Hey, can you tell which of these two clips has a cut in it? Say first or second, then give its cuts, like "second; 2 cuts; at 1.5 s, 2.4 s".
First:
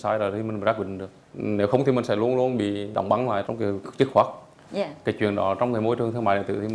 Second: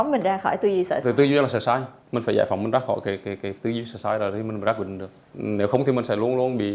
first; 1 cut; at 3.8 s